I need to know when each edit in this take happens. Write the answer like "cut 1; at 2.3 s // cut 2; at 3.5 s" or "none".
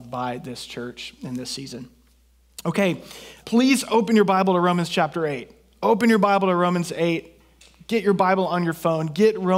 cut 1; at 3.4 s

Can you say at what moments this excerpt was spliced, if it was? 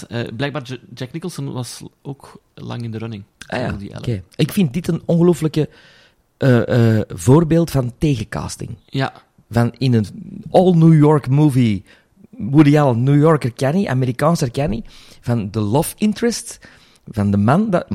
none

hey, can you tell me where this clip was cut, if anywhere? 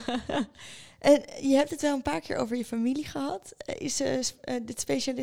none

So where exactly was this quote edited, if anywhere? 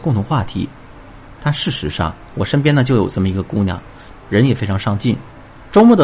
cut 1; at 4.1 s

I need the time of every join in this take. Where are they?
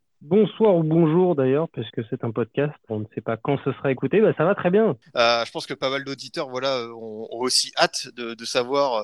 cut 1; at 2.9 s

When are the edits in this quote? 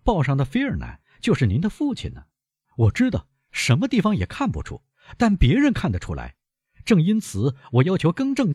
cut 1; at 2.6 s

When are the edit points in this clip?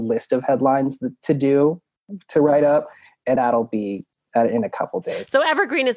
cut 1; at 3.4 s

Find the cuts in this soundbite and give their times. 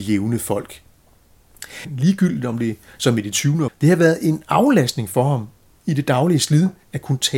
cut 1; at 3.7 s

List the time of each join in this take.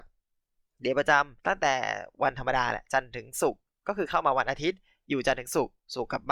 cut 1; at 1.4 s

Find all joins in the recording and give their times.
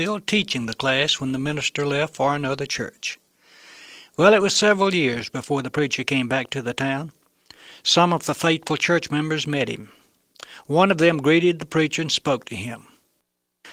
none

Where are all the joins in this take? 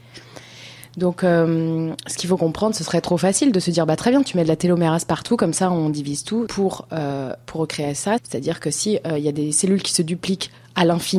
cut 1; at 6.5 s // cut 2; at 8.2 s

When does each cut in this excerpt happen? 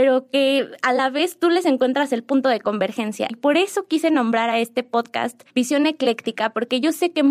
cut 1; at 3.3 s // cut 2; at 5.5 s

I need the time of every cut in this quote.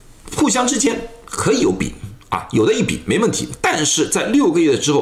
none

